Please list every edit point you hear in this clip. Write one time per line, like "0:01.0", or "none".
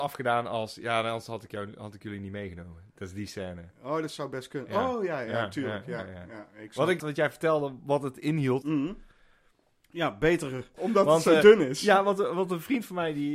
0:07.0
0:08.6
0:10.7